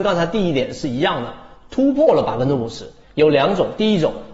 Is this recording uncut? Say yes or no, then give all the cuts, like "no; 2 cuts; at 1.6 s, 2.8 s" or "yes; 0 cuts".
yes; 0 cuts